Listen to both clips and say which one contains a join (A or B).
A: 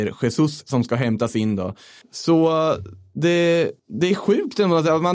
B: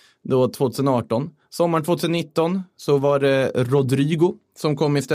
A